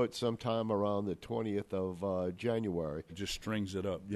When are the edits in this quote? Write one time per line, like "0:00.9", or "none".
0:03.1